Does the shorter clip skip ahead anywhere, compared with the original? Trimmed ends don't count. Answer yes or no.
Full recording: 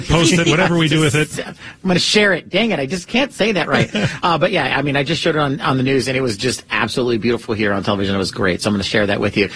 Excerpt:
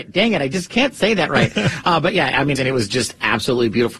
yes